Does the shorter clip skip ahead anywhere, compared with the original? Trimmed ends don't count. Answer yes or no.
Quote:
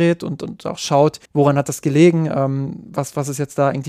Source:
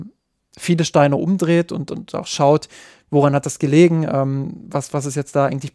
yes